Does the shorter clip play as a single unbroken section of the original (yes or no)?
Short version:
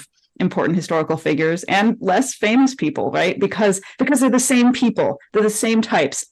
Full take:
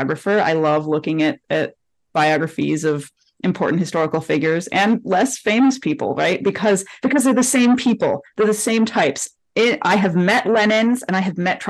yes